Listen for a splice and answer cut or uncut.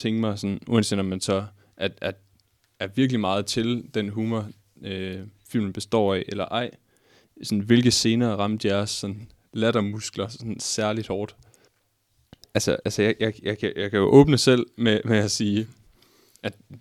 uncut